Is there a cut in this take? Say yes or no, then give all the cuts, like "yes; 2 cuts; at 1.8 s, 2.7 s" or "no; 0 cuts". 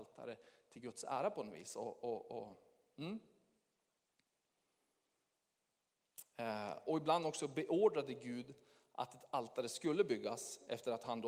no; 0 cuts